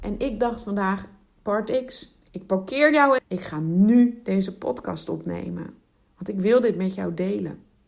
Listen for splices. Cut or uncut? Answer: cut